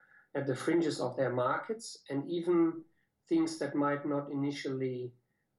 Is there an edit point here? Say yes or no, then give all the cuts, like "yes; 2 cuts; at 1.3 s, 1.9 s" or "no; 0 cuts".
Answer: no; 0 cuts